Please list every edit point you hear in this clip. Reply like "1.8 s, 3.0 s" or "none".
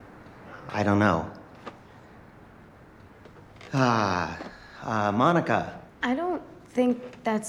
none